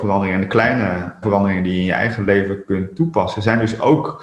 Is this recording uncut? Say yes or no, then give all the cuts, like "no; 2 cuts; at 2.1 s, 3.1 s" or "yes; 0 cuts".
no; 1 cut; at 1.2 s